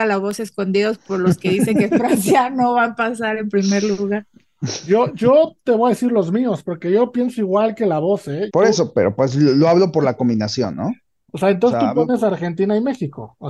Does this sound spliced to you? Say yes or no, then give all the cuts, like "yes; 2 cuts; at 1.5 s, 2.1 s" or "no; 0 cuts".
yes; 1 cut; at 8.5 s